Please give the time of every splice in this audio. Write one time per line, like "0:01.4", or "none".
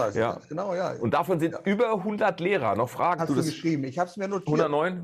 0:03.2